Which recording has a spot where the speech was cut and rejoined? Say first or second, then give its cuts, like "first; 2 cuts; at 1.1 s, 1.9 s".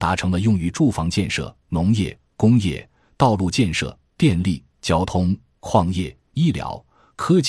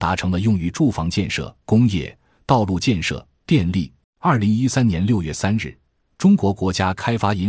second; 2 cuts; at 1.6 s, 4.0 s